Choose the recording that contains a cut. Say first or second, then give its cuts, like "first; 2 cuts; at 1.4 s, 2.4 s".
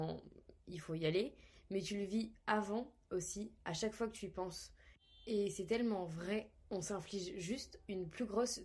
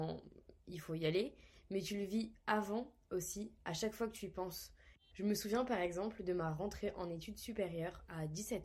second; 1 cut; at 5.1 s